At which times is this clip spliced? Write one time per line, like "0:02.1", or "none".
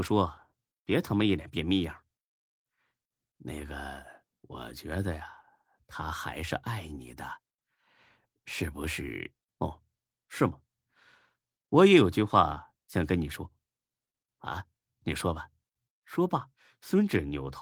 0:09.5
0:15.9